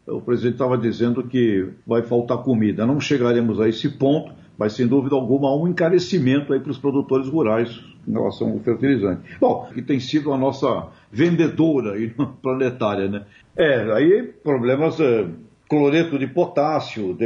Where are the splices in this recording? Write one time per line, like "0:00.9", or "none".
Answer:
0:01.8
0:09.7
0:13.4